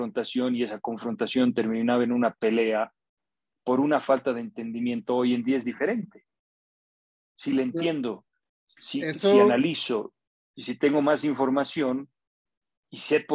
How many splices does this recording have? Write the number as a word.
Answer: zero